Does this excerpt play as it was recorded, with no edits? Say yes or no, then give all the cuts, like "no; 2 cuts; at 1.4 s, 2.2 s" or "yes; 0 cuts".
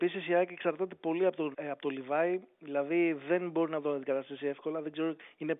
no; 1 cut; at 1.5 s